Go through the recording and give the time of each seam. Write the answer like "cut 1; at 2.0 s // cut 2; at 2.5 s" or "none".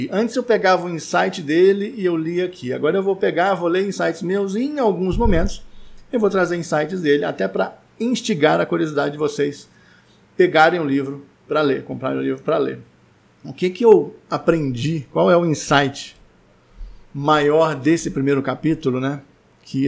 none